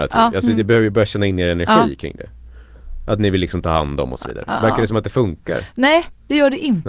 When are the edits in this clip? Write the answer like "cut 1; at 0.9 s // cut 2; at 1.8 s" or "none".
none

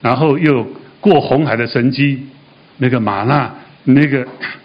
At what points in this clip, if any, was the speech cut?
cut 1; at 2.6 s

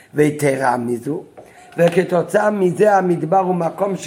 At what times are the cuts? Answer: cut 1; at 1.6 s

